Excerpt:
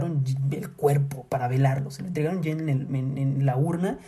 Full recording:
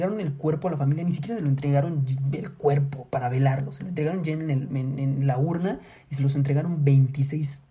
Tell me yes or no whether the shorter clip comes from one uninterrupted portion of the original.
yes